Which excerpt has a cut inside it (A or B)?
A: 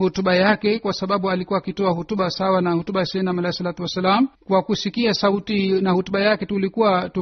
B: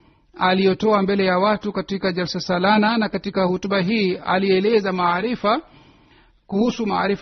A